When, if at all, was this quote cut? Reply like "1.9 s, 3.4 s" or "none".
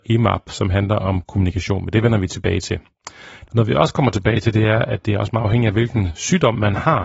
3.4 s